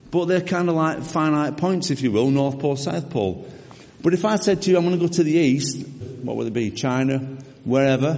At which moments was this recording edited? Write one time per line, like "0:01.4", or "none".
0:06.0